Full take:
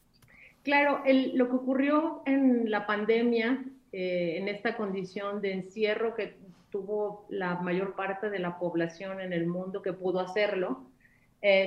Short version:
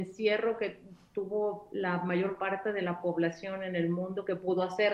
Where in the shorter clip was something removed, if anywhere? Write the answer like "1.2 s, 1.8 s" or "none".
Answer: none